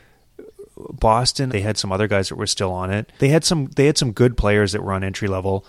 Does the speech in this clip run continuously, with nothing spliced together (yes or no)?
no